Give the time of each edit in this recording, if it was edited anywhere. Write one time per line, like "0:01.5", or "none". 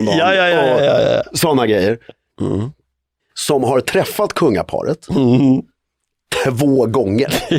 0:02.3

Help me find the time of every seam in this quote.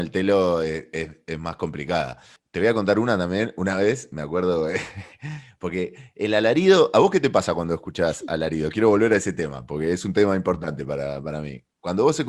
none

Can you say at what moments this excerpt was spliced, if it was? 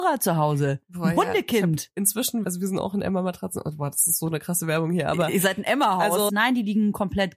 0:02.4
0:06.3

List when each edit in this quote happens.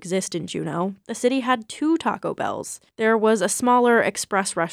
0:01.0
0:02.9

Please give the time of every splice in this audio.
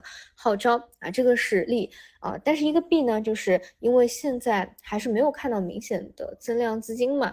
none

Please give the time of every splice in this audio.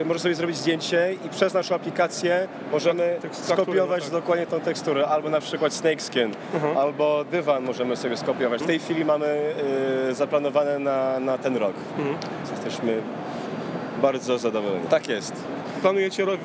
0:08.6
0:12.4
0:14.9

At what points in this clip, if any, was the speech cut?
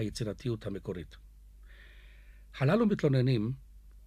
none

